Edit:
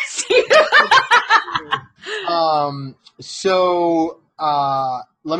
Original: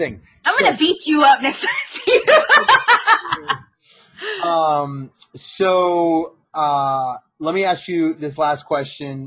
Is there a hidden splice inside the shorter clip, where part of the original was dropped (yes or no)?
yes